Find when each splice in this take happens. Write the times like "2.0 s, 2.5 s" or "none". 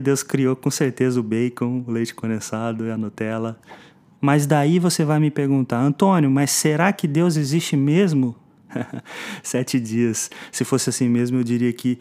4.1 s, 8.7 s